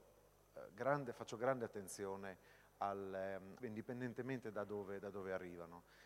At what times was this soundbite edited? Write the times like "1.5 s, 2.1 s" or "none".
3.6 s